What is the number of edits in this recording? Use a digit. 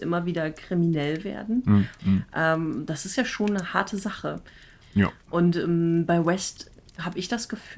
2